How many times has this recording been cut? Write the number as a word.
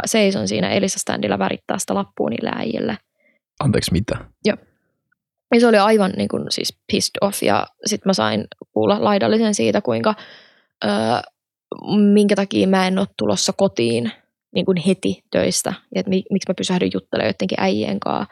one